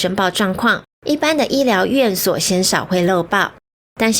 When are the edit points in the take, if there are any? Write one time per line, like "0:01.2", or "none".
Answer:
0:00.9